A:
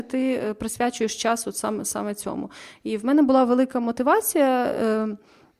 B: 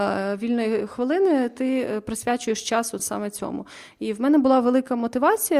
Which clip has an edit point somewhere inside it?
B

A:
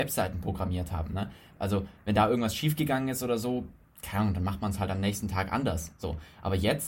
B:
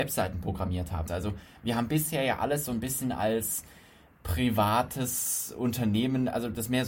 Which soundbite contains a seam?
B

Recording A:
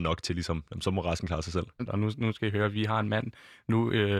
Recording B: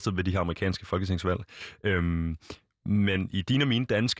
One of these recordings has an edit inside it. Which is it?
A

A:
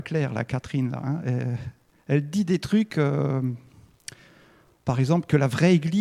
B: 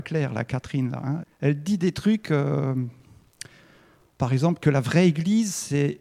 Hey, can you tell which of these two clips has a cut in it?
B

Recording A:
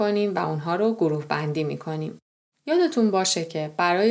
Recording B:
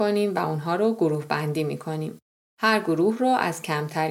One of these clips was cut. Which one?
A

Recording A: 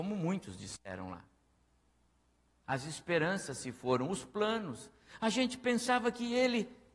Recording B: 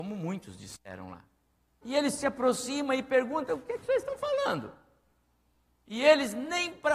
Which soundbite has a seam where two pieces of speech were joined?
B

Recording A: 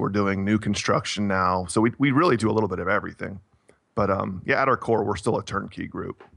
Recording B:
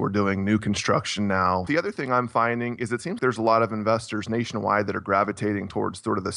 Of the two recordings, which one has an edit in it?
B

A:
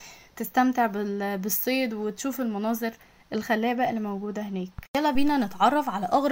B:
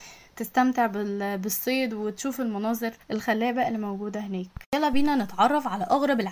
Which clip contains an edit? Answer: B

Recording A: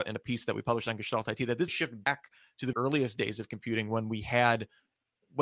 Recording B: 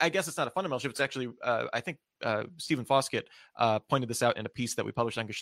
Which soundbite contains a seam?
A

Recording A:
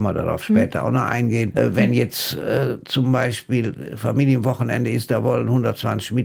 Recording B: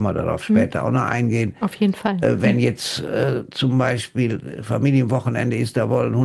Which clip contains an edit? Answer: A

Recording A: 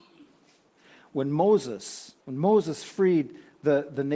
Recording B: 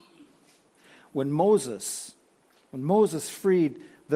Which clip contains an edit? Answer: A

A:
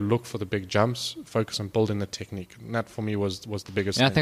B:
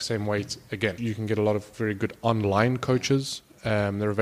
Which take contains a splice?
B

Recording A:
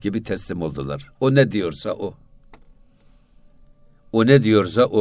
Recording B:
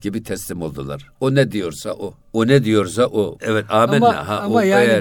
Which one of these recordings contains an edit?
B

